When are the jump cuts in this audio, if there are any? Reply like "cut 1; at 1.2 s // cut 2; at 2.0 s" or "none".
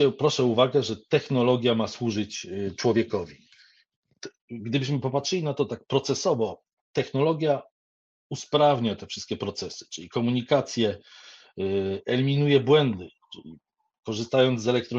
none